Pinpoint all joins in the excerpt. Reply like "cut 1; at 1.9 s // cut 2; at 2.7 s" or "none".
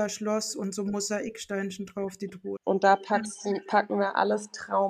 cut 1; at 2.6 s